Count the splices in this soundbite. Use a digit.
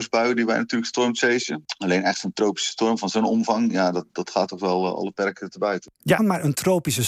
1